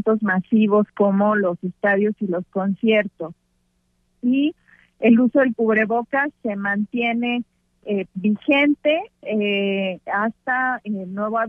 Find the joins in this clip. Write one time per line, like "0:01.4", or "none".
none